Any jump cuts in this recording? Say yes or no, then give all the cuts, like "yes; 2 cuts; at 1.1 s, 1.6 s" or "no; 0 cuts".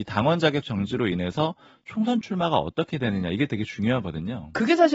no; 0 cuts